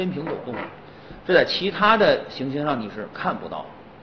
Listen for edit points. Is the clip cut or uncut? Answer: cut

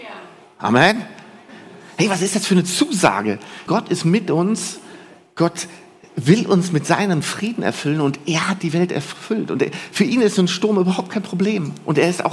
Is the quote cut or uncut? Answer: cut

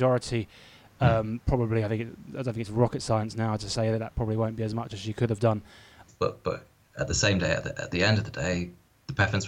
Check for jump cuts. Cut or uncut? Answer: cut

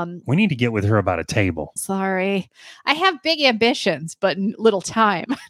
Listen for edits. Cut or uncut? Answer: cut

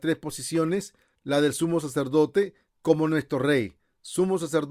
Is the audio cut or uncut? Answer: cut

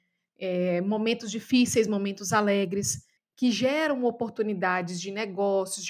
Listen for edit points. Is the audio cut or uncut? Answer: cut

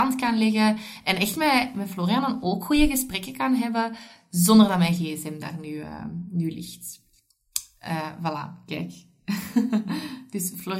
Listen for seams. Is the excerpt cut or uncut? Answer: uncut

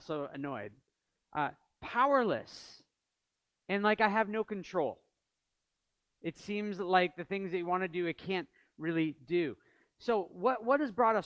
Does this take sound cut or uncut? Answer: uncut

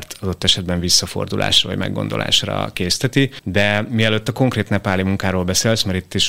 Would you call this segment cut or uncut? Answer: uncut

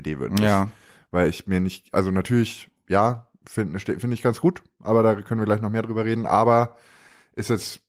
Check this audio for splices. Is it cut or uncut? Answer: uncut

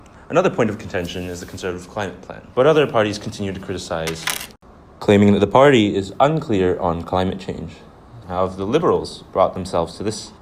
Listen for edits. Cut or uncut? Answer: cut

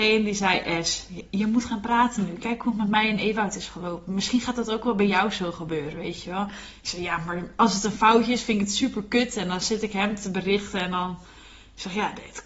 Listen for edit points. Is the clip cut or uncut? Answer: uncut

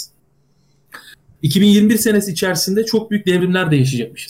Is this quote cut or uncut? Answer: uncut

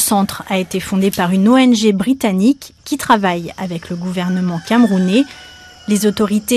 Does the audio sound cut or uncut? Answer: cut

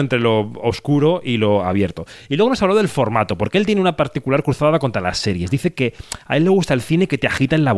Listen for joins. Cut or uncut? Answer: uncut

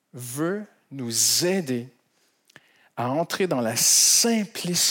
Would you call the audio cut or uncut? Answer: uncut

